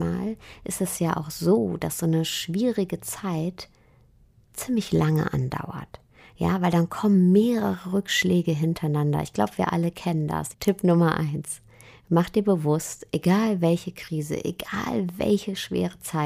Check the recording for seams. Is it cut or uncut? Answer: cut